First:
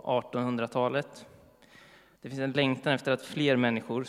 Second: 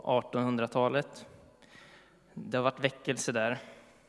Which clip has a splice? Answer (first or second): first